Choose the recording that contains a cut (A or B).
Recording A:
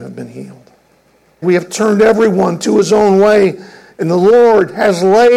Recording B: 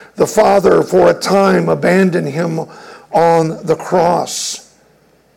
A